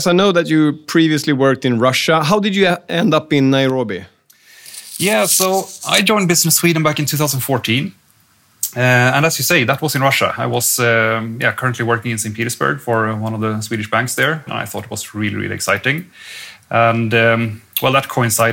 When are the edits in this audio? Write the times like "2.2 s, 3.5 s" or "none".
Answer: 14.5 s